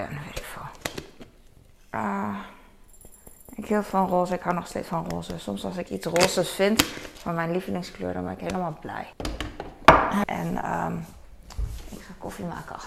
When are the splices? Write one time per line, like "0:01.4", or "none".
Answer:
0:09.1
0:10.2